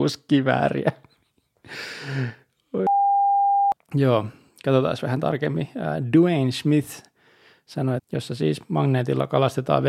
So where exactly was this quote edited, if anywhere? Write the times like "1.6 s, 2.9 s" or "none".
8.0 s